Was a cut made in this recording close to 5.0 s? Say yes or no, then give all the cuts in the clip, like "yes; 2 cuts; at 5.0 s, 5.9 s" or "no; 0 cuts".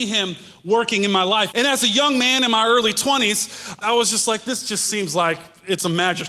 no; 2 cuts; at 1.5 s, 3.8 s